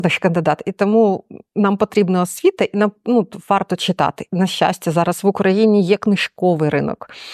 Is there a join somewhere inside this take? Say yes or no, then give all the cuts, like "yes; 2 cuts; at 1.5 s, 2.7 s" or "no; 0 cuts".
no; 0 cuts